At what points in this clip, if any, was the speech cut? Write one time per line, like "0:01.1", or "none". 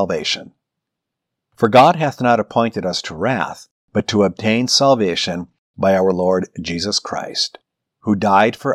none